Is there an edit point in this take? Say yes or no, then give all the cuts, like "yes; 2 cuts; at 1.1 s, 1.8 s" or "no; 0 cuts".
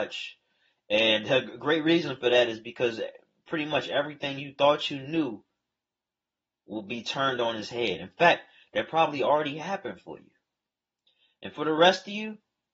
no; 0 cuts